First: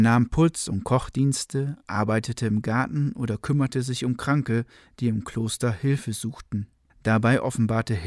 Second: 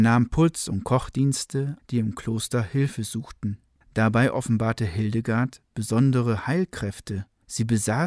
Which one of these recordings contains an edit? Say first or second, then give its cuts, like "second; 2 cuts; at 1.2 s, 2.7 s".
second; 1 cut; at 1.8 s